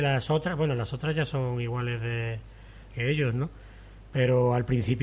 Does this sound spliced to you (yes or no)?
yes